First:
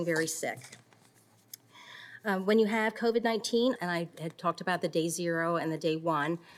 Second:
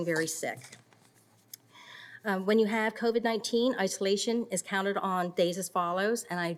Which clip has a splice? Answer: first; 1 cut; at 3.8 s

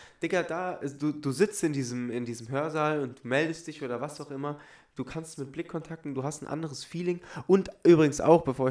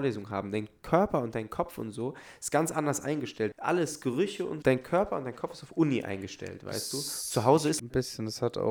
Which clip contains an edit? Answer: second; 3 cuts; at 3.5 s, 4.6 s, 7.8 s

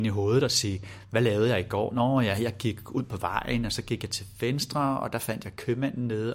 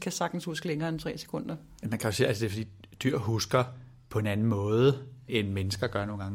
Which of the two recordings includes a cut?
second; 1 cut; at 5.3 s

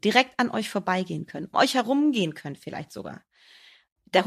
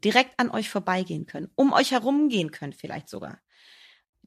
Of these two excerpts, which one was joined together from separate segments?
first; 1 cut; at 1.5 s

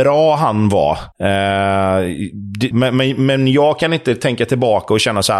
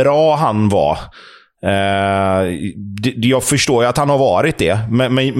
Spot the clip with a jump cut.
first; 2 cuts; at 1.1 s, 2.7 s

